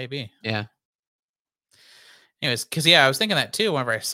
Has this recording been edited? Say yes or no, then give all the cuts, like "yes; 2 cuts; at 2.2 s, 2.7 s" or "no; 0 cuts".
no; 0 cuts